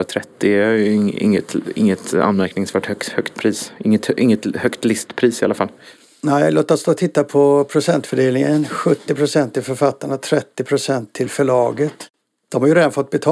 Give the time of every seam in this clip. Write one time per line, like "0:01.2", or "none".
none